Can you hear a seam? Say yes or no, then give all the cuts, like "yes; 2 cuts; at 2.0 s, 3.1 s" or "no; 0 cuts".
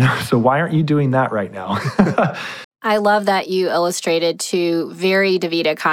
yes; 1 cut; at 2.6 s